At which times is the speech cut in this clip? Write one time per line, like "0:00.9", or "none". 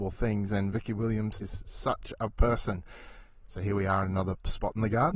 0:01.4